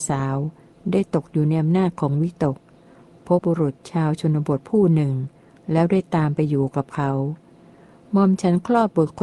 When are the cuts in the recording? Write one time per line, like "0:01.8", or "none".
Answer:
0:03.4